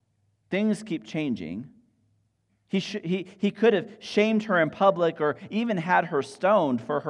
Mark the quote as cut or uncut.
uncut